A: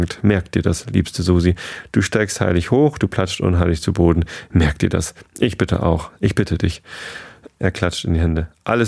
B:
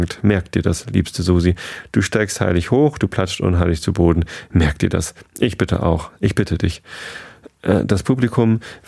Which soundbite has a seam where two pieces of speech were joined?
A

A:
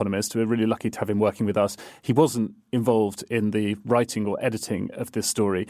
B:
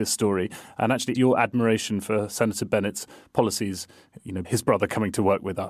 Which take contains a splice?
B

